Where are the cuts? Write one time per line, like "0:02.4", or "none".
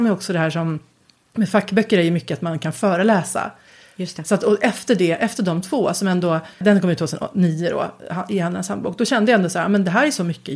0:06.6